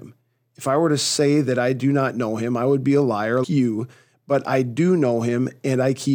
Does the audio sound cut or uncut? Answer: cut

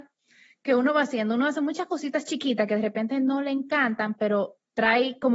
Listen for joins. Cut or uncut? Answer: uncut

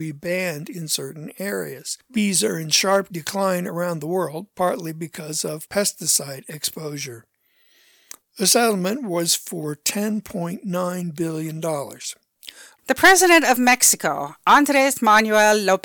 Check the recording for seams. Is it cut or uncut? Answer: cut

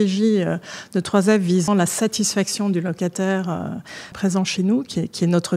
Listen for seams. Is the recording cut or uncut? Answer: cut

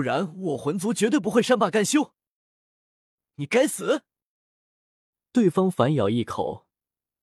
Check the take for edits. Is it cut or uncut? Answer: uncut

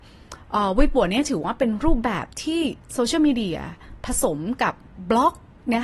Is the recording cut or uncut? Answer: uncut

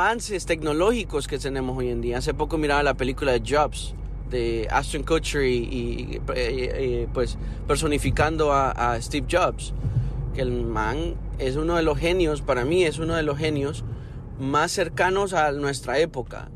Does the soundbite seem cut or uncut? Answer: uncut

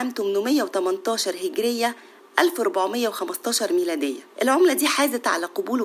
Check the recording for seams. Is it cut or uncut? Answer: cut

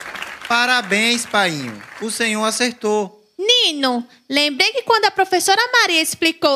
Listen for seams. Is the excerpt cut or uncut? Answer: uncut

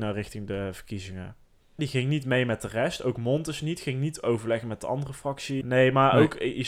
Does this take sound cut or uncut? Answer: cut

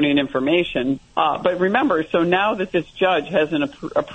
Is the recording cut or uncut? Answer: cut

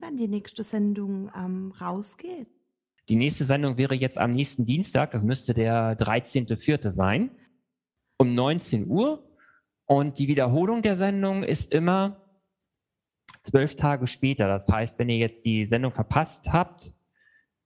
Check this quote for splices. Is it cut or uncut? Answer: uncut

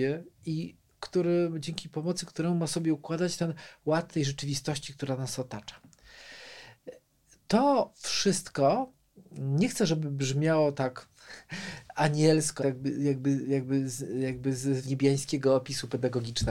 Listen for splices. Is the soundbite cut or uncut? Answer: cut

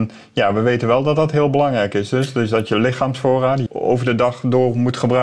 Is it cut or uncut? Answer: cut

